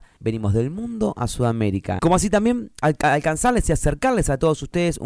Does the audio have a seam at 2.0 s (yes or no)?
yes